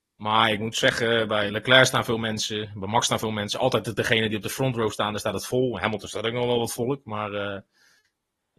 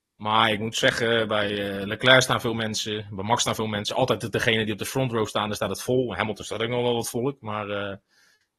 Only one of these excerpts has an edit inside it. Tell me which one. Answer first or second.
first